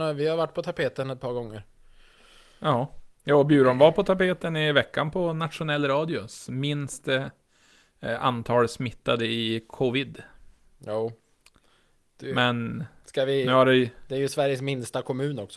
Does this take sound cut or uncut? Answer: uncut